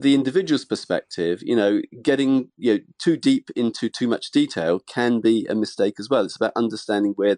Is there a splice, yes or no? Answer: no